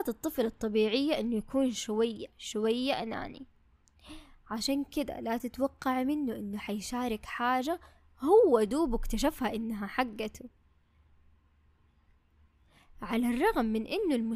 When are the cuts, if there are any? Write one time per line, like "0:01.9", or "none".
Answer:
none

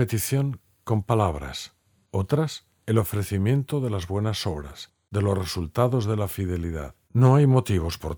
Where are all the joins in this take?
0:07.1

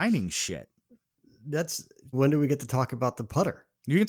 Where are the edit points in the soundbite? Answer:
0:02.1

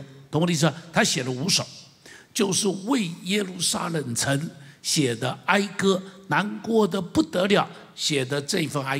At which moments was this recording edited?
none

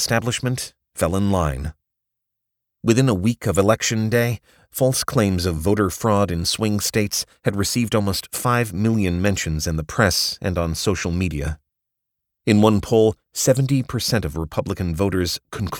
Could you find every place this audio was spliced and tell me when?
none

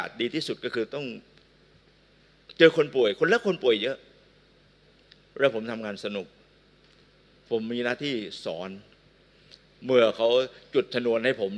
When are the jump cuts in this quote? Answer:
none

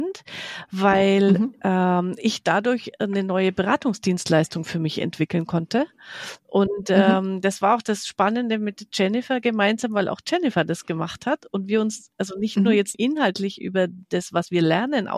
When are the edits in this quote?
0:12.9

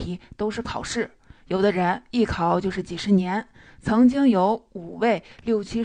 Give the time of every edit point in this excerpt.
none

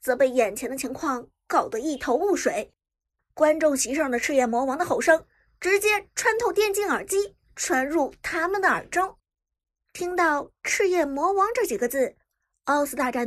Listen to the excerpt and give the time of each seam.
none

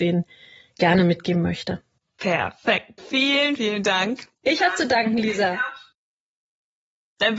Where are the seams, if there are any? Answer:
0:03.6

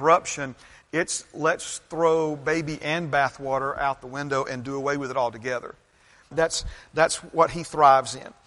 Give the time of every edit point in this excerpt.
0:06.3

